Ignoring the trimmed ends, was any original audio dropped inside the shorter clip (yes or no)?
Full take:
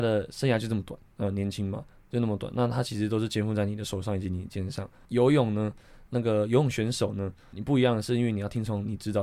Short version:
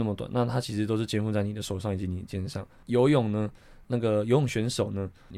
no